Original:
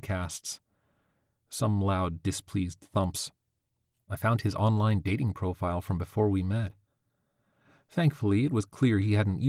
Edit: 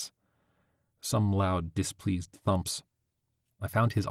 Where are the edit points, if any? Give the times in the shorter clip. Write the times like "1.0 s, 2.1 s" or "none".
none